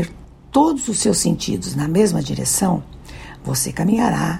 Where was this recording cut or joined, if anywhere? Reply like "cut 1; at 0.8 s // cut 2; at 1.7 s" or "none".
none